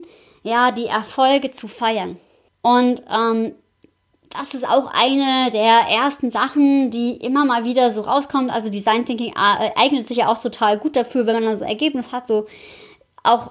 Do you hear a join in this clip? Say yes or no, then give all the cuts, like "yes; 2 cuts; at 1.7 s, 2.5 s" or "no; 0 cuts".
yes; 1 cut; at 2.5 s